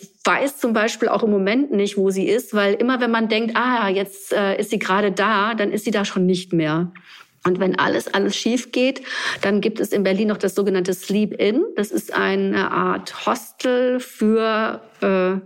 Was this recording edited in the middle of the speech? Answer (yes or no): no